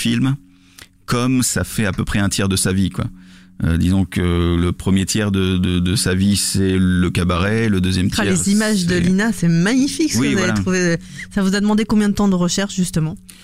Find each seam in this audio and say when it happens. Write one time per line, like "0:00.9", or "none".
none